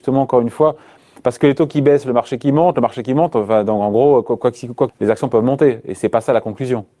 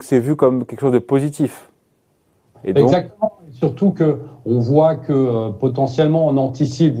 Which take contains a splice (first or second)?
first